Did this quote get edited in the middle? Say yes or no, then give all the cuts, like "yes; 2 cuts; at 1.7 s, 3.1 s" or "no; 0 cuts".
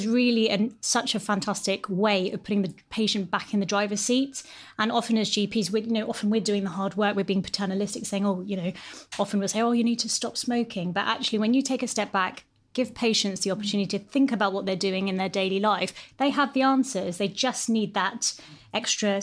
no; 0 cuts